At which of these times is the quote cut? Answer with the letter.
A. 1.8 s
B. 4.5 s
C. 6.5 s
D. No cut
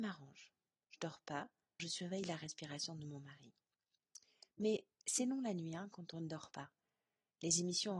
A